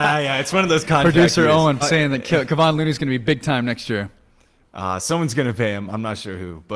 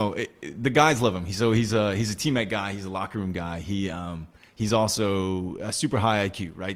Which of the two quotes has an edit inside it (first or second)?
first